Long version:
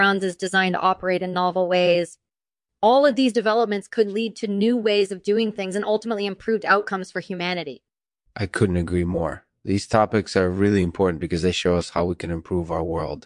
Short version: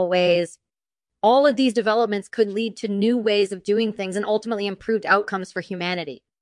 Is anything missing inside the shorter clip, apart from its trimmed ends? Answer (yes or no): no